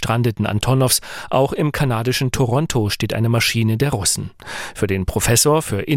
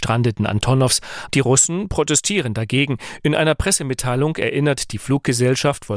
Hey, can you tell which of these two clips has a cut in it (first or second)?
second